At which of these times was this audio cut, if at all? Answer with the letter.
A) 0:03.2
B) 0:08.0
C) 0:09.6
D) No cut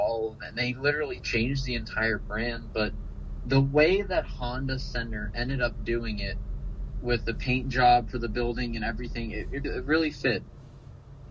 C